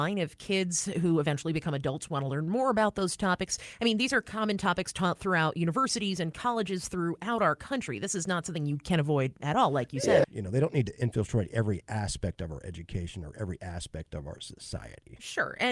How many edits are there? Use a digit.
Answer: 1